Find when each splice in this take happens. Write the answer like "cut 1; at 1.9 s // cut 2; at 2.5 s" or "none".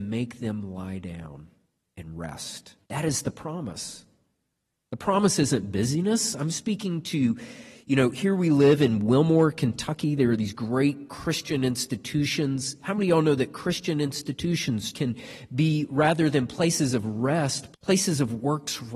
cut 1; at 2.8 s // cut 2; at 14.9 s // cut 3; at 17.7 s